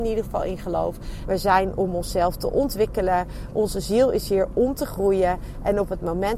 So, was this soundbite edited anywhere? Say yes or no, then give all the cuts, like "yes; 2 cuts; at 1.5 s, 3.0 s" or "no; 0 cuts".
yes; 1 cut; at 1.2 s